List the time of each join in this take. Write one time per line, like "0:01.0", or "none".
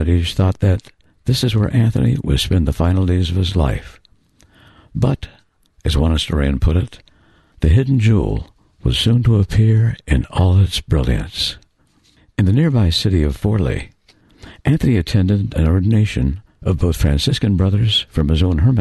none